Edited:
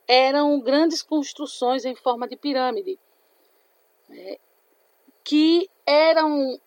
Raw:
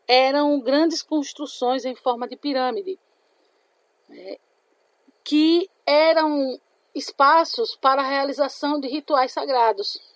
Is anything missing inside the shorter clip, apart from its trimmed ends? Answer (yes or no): no